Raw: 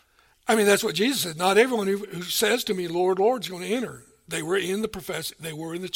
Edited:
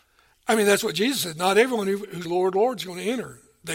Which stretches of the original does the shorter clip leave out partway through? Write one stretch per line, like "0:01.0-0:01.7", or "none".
0:02.2-0:02.9

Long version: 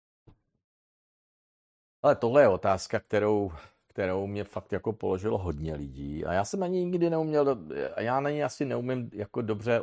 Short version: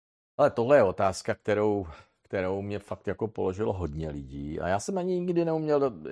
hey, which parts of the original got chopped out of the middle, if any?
none

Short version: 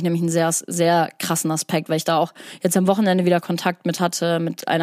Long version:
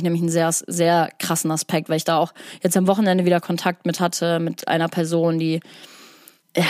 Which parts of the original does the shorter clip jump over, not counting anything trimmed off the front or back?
none

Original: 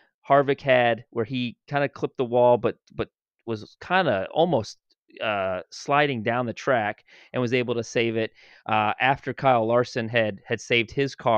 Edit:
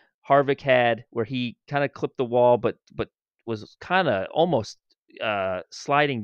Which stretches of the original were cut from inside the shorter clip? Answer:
none

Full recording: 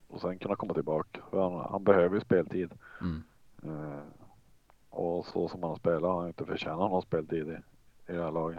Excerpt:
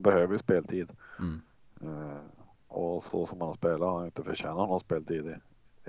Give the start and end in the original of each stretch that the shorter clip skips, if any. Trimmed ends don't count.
0:04.4-0:04.8

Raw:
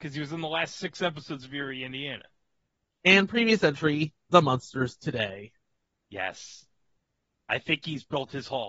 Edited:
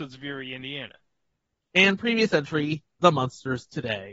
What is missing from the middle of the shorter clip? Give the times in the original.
none

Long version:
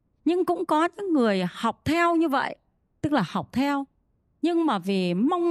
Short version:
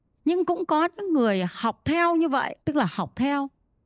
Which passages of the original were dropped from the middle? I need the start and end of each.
0:02.6-0:03.0

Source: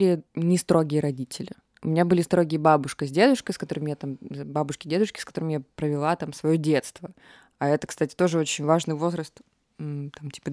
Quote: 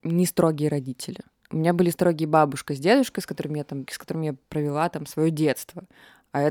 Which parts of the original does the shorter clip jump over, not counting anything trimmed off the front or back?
0:04.2-0:05.1

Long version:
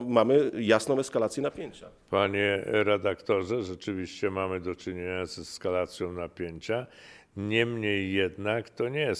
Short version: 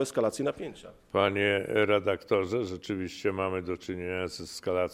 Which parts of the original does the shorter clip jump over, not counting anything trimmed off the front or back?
none

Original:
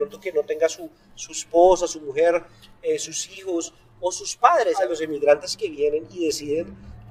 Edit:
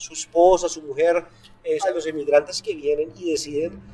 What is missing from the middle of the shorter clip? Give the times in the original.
0:03.0-0:04.7

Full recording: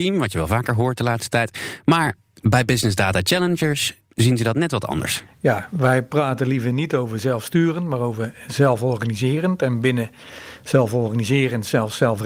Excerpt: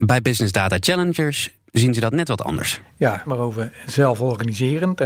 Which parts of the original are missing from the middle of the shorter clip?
0:05.7-0:07.9

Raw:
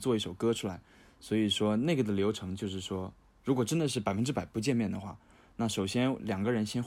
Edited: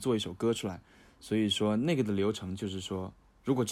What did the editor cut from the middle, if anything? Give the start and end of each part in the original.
none

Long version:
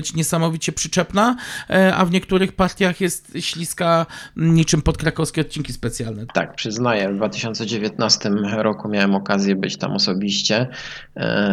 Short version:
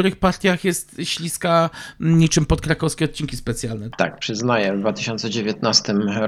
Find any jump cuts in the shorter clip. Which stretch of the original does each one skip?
none

